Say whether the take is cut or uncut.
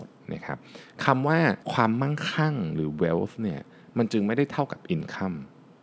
cut